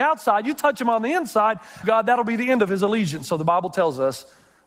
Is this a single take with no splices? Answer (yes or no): no